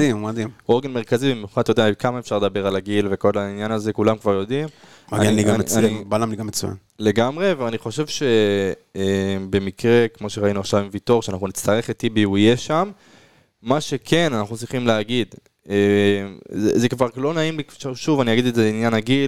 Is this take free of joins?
yes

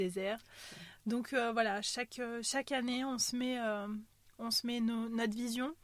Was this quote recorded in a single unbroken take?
yes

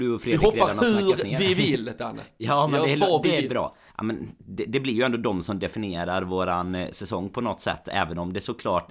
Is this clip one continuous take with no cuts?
no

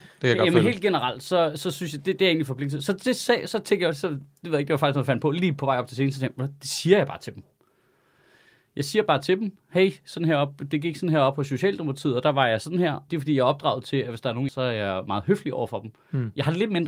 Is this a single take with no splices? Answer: no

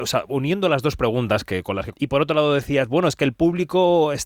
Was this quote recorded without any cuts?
no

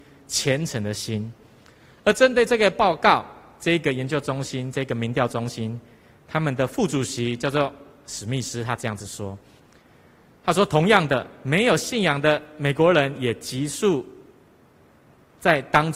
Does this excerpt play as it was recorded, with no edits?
no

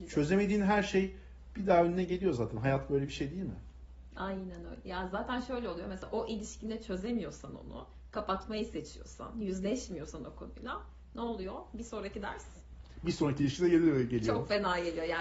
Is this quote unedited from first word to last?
yes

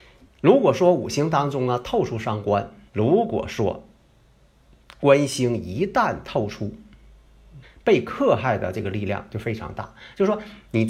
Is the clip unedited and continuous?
no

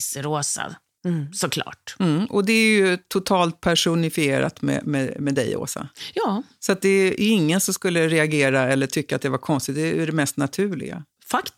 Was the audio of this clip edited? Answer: no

